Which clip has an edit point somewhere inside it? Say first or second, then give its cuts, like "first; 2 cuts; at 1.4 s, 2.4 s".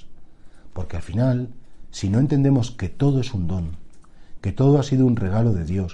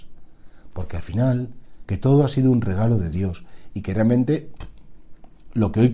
second; 1 cut; at 1.8 s